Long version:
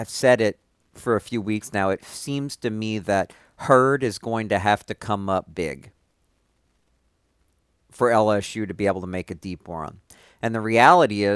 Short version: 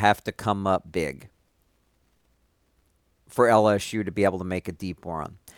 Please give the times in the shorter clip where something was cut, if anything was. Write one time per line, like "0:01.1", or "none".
none